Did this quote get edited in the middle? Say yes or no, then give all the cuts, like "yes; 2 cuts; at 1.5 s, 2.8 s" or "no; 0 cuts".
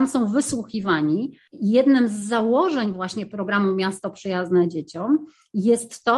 no; 0 cuts